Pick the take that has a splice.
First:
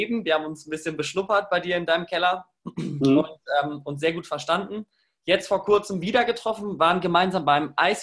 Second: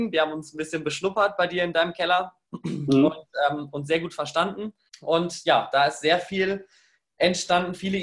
second; 1 cut; at 4.9 s

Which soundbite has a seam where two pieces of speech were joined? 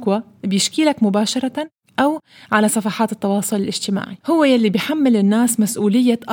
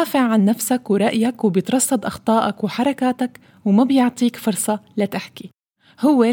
first; 1 cut; at 4.2 s

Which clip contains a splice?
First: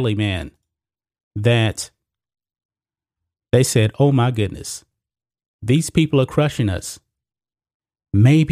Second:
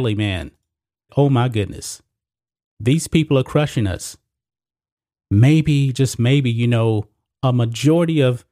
second; 1 cut; at 1.1 s

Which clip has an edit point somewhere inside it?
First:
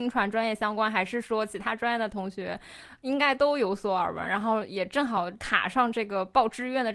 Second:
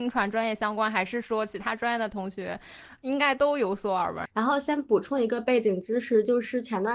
second; 1 cut; at 4.3 s

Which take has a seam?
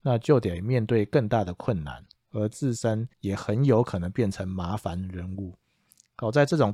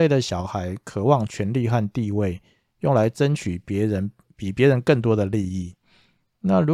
first; 1 cut; at 3.1 s

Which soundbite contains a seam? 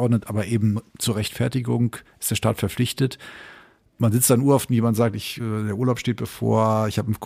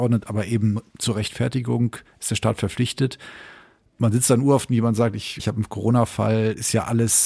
second; 1 cut; at 5.4 s

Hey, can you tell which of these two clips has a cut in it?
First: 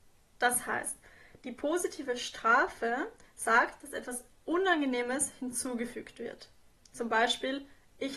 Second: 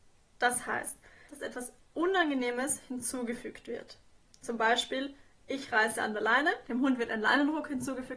second; 1 cut; at 1.3 s

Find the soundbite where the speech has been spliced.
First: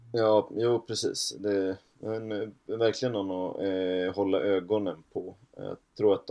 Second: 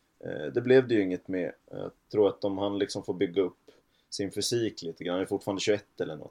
second; 1 cut; at 1.6 s

